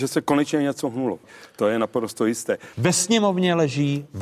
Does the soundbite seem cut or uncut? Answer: cut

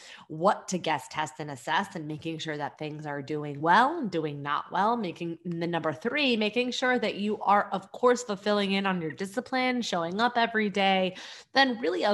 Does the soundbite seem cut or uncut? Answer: uncut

